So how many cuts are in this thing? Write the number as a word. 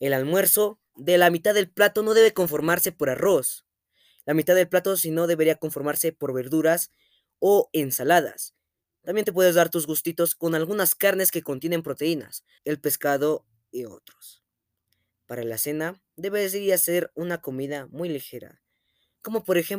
one